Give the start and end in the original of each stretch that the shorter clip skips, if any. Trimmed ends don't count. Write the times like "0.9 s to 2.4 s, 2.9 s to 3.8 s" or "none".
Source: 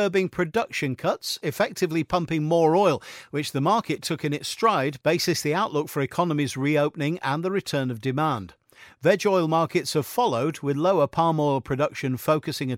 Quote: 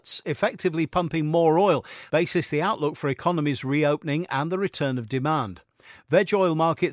3.3 s to 5.0 s